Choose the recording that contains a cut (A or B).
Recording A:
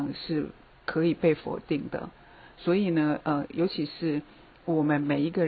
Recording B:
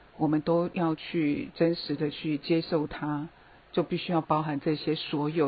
B